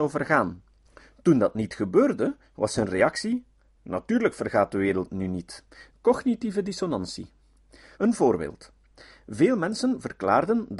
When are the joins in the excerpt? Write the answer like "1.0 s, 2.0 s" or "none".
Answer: 3.8 s, 5.9 s, 7.9 s